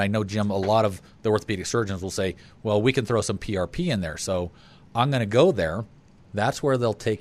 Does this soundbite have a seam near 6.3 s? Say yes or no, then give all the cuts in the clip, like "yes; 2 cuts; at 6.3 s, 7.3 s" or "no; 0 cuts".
yes; 1 cut; at 6.3 s